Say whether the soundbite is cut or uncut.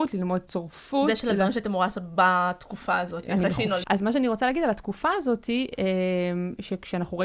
cut